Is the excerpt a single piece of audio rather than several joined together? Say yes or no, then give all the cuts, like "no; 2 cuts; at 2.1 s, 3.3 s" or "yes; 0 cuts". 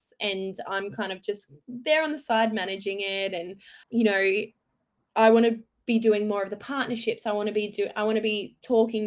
no; 1 cut; at 3.8 s